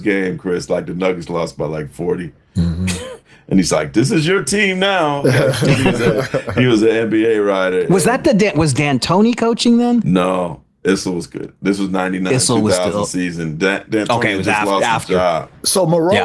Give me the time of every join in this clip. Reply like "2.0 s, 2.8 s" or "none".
none